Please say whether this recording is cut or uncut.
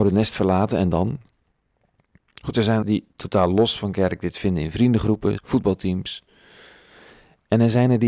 cut